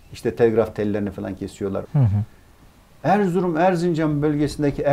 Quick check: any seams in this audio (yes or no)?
yes